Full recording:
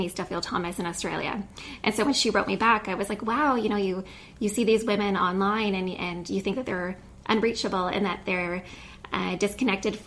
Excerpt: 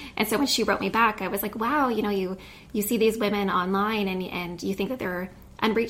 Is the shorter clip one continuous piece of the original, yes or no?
yes